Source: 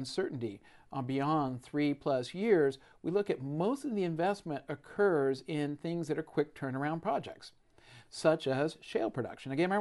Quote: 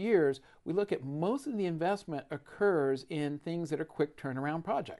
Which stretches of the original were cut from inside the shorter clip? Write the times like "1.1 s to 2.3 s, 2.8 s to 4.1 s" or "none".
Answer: none